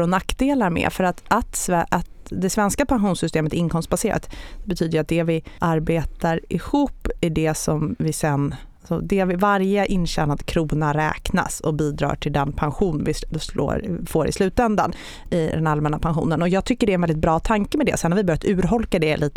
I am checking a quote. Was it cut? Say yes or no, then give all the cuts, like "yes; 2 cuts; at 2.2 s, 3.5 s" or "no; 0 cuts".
no; 0 cuts